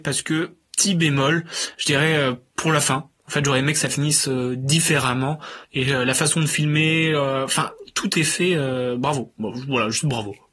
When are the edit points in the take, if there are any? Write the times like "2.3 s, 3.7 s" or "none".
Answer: 5.6 s